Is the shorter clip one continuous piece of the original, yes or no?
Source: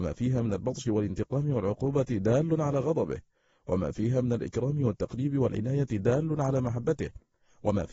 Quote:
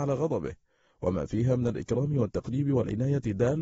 yes